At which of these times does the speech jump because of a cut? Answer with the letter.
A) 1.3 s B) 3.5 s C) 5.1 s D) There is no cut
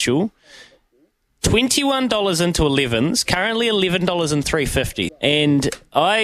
C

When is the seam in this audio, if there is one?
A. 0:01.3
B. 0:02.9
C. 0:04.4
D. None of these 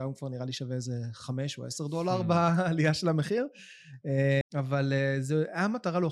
C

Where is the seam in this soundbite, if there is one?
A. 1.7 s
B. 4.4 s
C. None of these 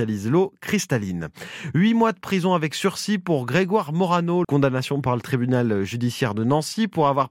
B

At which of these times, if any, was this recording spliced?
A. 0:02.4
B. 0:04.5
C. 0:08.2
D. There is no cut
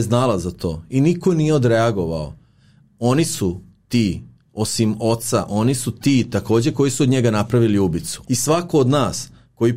C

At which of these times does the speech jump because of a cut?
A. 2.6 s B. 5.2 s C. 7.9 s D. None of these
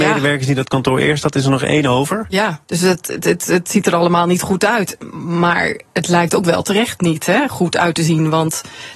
A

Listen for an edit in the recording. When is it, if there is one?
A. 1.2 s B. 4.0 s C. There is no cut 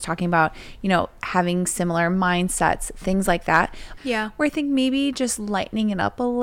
B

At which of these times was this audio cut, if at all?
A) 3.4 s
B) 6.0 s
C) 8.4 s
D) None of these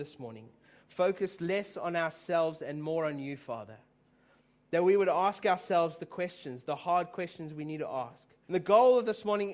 C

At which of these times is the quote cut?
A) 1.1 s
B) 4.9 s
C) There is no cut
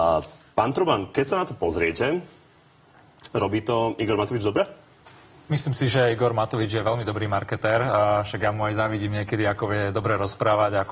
C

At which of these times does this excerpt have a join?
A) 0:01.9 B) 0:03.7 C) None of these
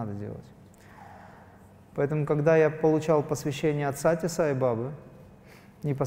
A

